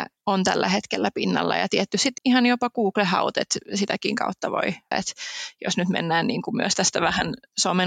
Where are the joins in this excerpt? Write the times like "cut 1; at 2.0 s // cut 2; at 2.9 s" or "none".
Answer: cut 1; at 2.2 s // cut 2; at 4.9 s